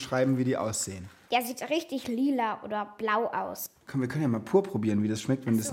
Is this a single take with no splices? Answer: yes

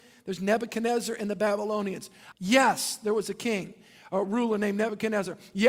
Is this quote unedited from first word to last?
no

